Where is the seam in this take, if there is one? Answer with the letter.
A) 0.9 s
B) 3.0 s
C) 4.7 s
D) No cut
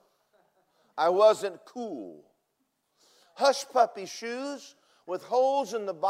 D